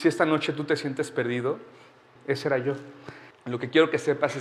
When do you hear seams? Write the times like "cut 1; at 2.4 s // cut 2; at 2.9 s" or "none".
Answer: cut 1; at 2.2 s // cut 2; at 3.3 s